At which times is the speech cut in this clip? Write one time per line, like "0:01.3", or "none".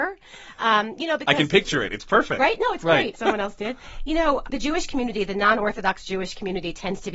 0:03.1
0:04.4